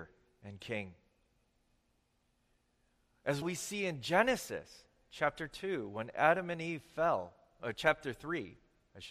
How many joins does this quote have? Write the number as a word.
one